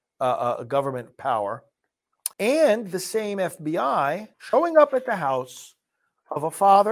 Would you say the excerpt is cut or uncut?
cut